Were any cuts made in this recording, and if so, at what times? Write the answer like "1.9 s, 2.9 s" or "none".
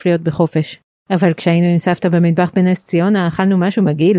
none